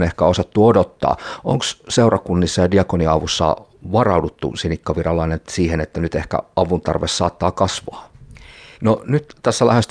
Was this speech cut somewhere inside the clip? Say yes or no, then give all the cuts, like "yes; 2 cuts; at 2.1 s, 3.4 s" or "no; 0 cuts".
yes; 1 cut; at 8.7 s